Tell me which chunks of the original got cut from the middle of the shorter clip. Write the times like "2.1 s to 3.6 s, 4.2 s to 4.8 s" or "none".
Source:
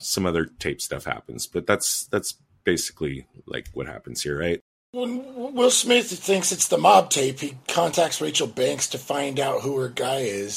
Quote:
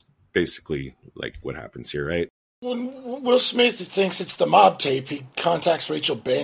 none